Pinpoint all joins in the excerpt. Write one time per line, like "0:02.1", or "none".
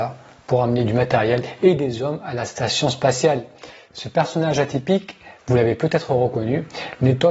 none

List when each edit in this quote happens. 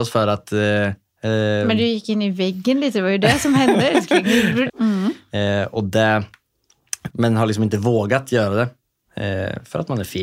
0:04.7
0:07.1

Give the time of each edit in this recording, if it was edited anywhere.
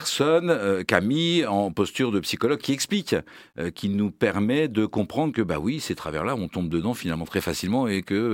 none

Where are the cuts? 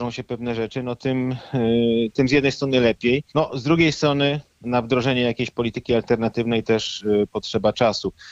0:03.3
0:04.6

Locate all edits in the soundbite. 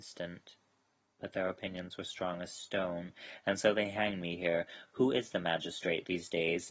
none

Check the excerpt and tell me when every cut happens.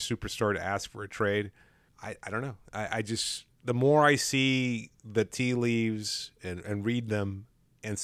0:01.9
0:03.5

